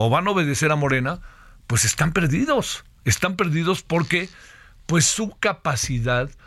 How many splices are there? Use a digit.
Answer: 0